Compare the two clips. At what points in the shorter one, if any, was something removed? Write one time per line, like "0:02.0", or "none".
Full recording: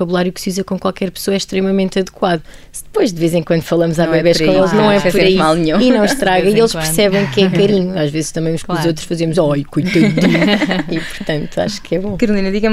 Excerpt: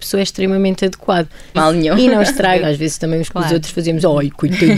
0:01.5
0:02.6

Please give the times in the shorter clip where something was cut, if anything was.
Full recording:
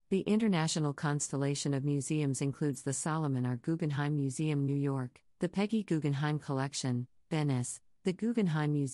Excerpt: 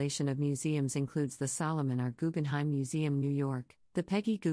none

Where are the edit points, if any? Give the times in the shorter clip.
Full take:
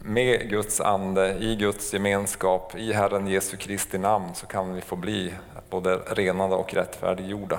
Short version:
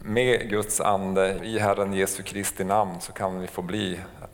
0:01.4

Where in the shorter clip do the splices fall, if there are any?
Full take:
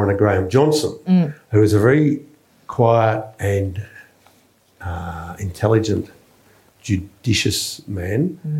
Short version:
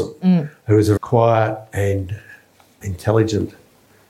0:01.0
0:02.8

